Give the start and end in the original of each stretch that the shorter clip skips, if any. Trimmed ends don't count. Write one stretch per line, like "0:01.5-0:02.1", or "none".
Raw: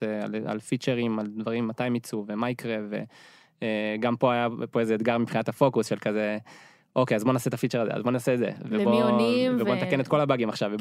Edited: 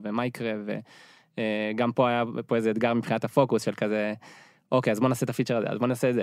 none